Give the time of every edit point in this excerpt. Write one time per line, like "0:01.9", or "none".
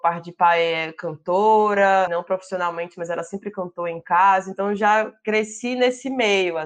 0:02.1